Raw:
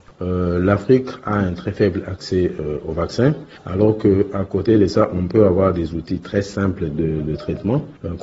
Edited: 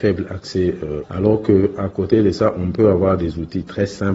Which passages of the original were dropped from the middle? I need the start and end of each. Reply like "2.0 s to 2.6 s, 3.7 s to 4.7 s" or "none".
2.8 s to 3.6 s